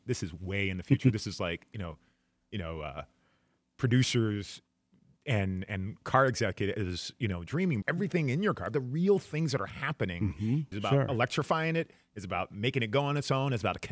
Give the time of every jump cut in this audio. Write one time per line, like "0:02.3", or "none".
0:07.8
0:10.7